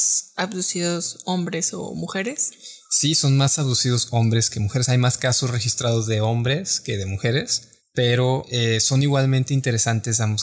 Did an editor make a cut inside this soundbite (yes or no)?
no